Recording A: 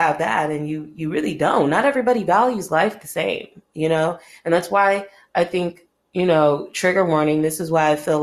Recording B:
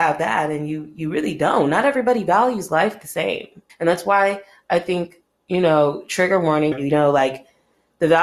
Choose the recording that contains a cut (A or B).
B